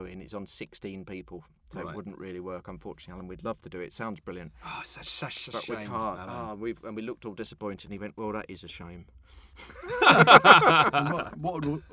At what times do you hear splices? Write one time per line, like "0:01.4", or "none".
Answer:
none